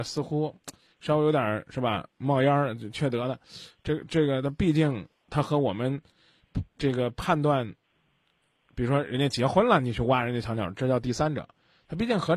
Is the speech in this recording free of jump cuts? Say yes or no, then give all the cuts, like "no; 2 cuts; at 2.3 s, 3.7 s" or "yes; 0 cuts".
yes; 0 cuts